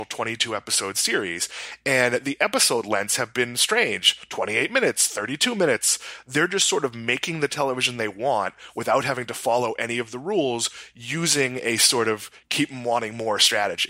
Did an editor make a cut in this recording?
no; 0 cuts

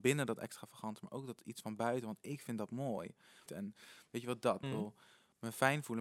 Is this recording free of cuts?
no; 2 cuts; at 3.5 s, 4.6 s

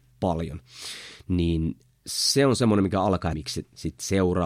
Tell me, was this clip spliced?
yes; 1 cut; at 3.3 s

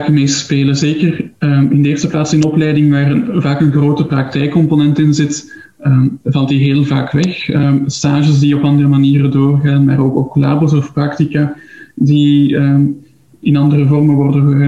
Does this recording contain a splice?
no; 0 cuts

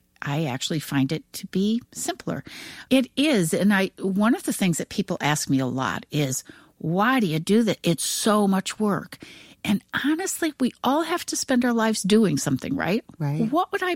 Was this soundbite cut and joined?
yes; 1 cut; at 2.9 s

